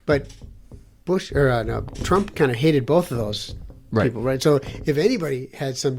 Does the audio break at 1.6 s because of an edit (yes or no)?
no